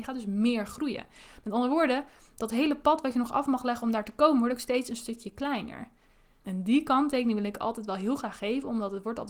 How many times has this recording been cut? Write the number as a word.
one